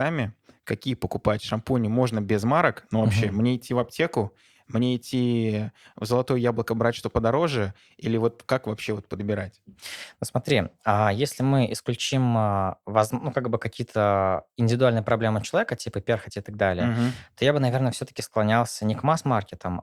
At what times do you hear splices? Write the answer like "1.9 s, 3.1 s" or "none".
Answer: 8.5 s